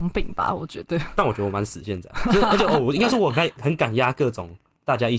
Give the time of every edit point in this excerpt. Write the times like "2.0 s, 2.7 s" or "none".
3.6 s